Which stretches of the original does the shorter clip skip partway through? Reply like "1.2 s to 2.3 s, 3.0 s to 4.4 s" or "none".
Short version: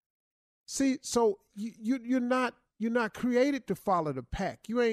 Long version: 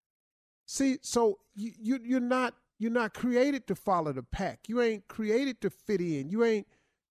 none